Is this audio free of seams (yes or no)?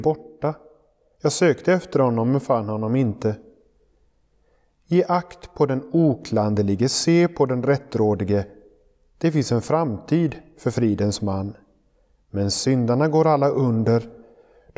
yes